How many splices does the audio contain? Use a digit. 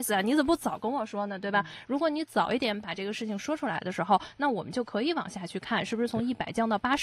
0